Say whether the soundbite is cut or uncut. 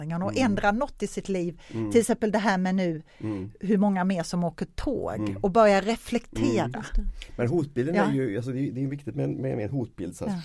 uncut